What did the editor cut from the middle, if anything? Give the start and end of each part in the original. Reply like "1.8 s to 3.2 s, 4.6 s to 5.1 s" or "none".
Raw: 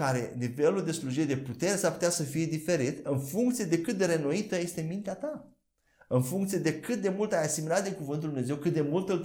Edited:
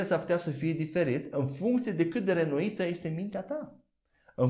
none